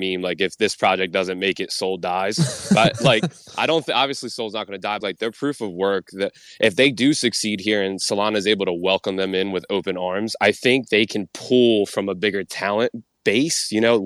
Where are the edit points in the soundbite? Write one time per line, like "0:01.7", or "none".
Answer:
0:05.0